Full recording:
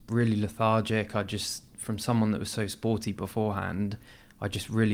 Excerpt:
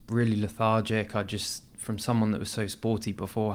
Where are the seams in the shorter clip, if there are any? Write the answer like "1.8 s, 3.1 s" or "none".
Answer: none